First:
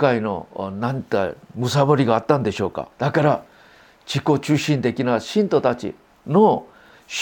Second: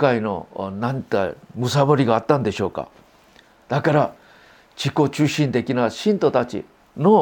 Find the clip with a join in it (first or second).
first